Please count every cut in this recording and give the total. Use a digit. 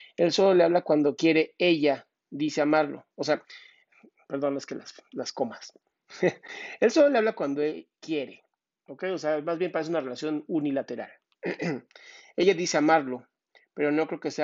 0